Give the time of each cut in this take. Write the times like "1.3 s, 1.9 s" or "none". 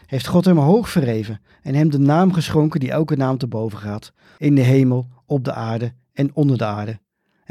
4.4 s